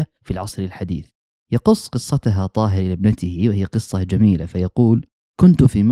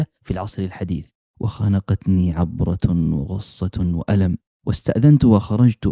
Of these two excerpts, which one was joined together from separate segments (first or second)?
second